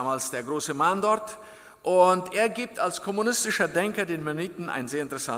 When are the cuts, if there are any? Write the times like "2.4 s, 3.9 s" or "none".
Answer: none